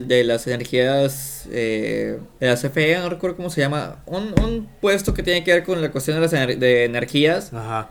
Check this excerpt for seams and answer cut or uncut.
cut